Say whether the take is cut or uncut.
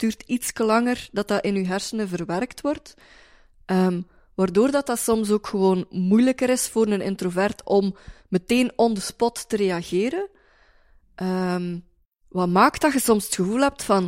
uncut